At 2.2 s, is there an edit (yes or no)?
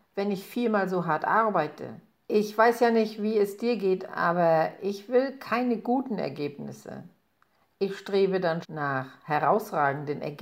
yes